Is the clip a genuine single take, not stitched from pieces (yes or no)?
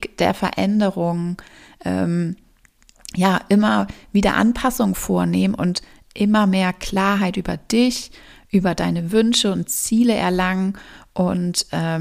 yes